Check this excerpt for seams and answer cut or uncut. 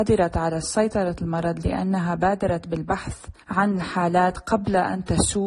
cut